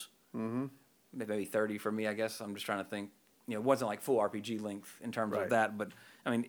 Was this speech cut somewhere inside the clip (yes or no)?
no